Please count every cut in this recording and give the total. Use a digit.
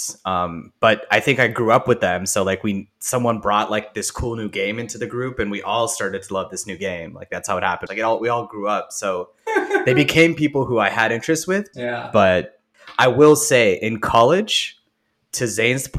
2